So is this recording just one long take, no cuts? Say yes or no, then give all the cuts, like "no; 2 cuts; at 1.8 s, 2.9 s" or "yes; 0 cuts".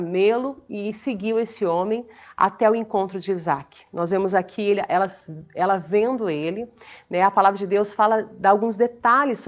yes; 0 cuts